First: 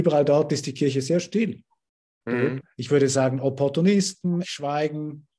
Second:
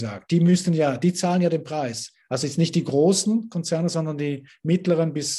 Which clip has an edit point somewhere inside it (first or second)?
first